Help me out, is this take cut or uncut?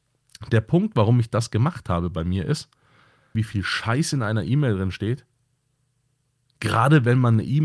cut